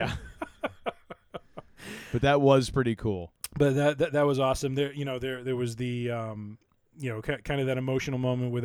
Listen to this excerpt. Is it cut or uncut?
uncut